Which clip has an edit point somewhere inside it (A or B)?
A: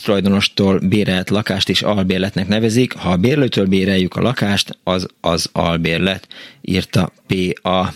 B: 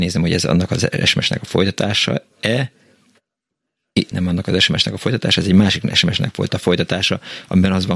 B